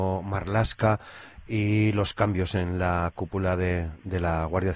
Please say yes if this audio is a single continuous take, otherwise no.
yes